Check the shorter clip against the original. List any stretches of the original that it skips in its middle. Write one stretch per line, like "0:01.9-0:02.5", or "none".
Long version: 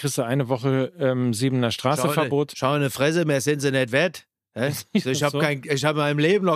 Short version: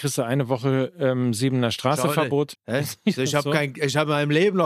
0:02.5-0:04.4